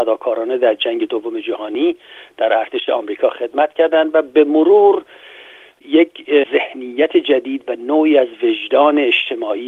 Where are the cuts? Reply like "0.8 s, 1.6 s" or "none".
none